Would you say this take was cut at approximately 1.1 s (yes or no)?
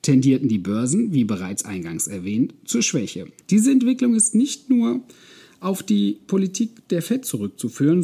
no